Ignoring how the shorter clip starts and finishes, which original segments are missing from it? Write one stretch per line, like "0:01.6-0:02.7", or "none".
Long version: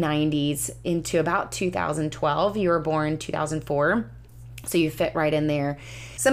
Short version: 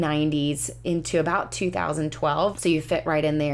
0:02.5-0:04.6